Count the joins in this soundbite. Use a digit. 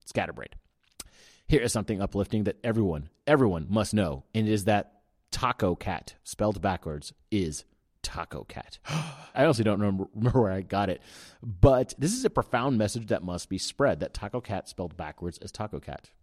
1